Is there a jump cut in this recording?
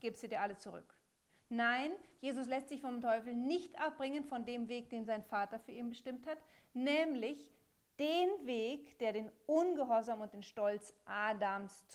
yes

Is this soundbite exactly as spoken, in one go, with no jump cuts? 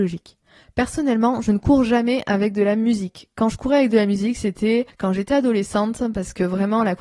yes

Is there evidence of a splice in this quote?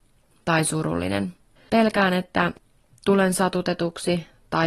yes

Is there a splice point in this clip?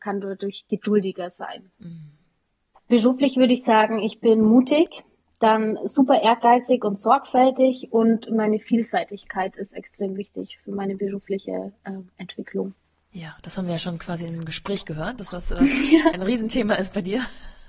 yes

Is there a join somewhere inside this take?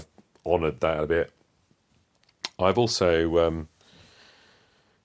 no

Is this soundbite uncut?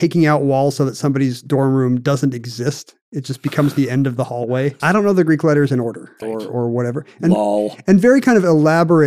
no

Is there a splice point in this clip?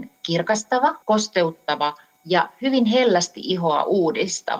yes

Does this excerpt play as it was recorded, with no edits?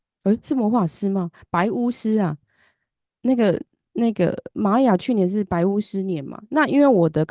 yes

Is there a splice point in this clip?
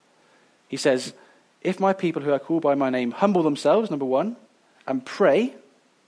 no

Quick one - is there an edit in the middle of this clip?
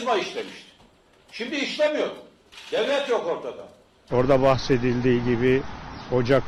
yes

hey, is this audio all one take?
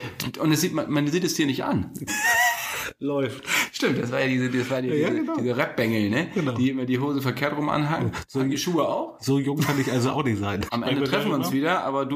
no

